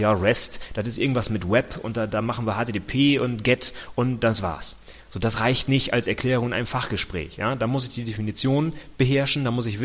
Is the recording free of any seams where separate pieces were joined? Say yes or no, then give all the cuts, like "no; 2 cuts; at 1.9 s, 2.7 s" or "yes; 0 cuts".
yes; 0 cuts